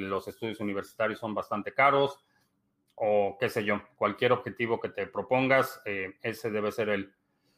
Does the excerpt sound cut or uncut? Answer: uncut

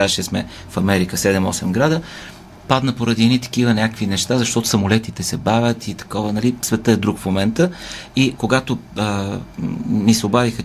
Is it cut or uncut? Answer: cut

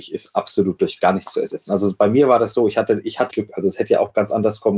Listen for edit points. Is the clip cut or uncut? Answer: cut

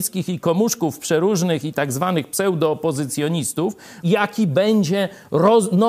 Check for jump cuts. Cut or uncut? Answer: cut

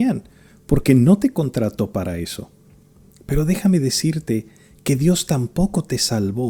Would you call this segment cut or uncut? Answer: uncut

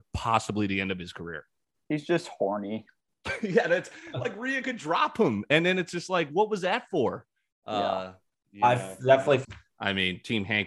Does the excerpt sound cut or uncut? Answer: cut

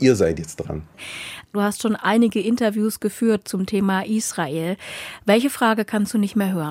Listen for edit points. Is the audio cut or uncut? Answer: uncut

